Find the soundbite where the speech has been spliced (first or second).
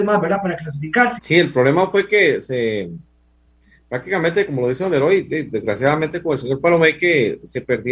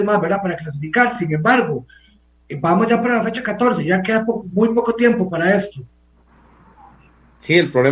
first